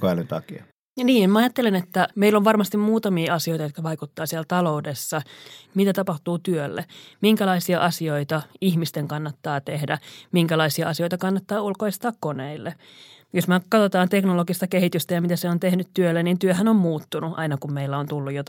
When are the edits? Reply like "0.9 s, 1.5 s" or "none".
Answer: 5.6 s